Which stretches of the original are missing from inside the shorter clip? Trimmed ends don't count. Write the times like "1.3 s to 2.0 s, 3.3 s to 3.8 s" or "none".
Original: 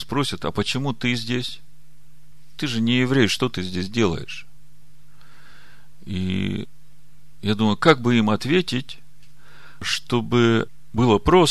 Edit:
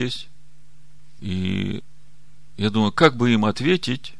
2.5 s to 6.0 s

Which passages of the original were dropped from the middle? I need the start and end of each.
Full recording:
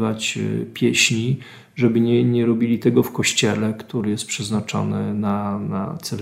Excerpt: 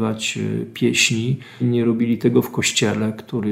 1.6 s to 2.2 s

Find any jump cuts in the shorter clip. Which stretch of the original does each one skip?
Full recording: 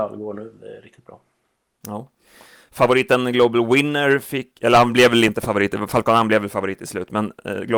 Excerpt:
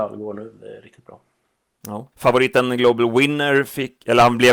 2.1 s to 2.7 s

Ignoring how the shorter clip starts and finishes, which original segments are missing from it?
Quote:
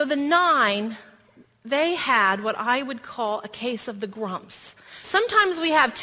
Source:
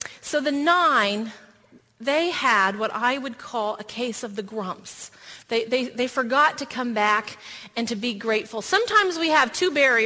5.4 s to 8.6 s

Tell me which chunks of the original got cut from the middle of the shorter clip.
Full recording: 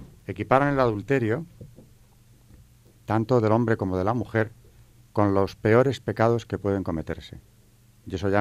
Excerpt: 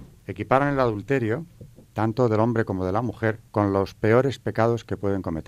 1.8 s to 3.0 s, 4.6 s to 5.1 s

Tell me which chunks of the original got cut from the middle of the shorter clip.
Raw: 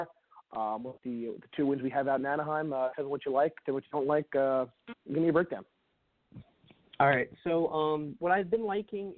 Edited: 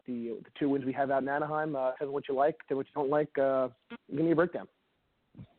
none

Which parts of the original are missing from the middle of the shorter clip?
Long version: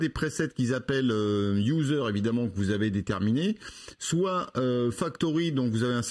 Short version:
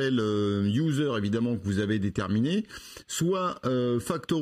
none

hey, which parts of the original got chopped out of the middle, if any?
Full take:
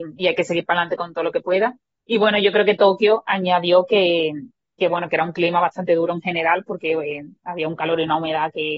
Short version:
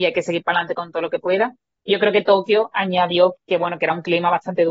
2.1 s to 2.4 s, 3.9 s to 4.6 s

